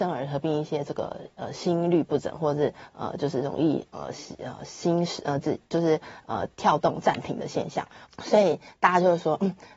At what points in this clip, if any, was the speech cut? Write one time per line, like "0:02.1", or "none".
0:08.1